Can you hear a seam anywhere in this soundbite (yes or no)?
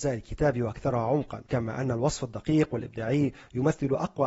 yes